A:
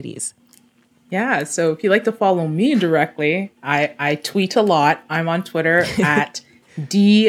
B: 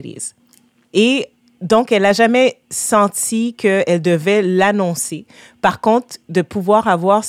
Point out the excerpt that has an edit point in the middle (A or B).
B